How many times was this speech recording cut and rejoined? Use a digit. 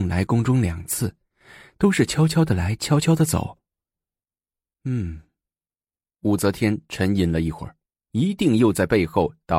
1